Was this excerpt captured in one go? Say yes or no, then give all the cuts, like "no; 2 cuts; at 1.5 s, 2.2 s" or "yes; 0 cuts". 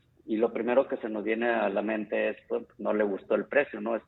yes; 0 cuts